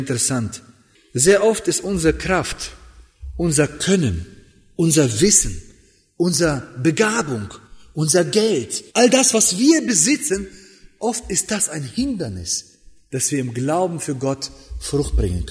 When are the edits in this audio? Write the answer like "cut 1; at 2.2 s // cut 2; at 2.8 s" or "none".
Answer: cut 1; at 8.9 s

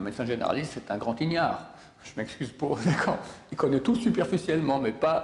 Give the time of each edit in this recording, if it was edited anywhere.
none

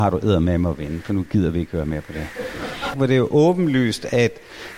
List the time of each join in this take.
cut 1; at 2.9 s

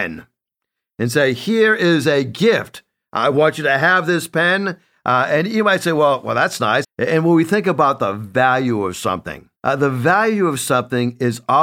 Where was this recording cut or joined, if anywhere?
cut 1; at 6.8 s // cut 2; at 9.6 s

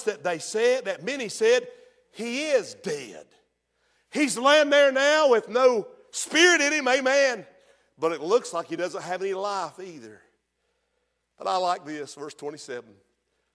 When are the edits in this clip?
none

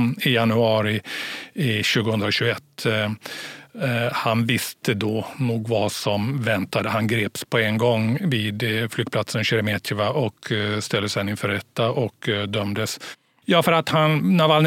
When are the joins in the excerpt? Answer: cut 1; at 13.4 s

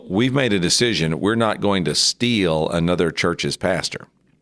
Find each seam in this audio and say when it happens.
none

